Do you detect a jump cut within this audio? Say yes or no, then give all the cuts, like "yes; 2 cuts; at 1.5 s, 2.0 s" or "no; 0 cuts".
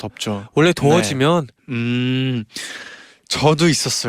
yes; 1 cut; at 1.6 s